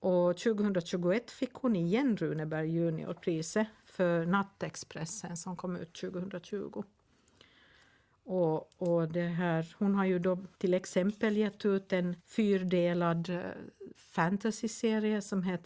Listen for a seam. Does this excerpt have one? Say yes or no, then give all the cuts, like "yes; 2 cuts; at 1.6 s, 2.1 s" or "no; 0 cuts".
yes; 2 cuts; at 10.5 s, 12.2 s